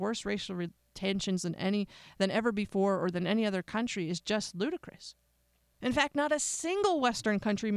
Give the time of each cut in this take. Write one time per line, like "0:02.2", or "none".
0:05.7